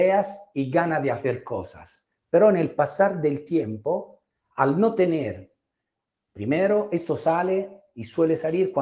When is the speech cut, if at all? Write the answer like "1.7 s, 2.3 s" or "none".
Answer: 2.2 s, 4.4 s